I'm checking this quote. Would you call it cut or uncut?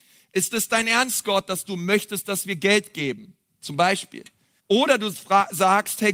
cut